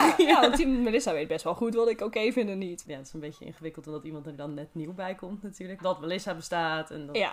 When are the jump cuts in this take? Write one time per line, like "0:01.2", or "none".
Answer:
0:02.9
0:05.8

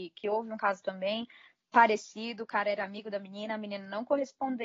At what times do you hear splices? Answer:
none

